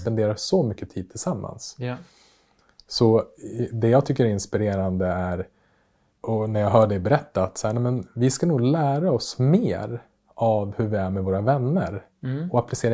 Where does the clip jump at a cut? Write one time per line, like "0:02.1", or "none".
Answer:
none